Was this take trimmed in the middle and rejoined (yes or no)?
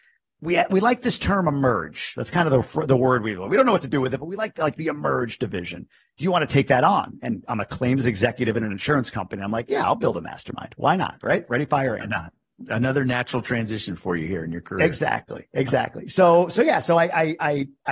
no